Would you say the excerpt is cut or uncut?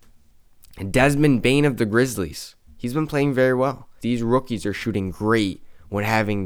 cut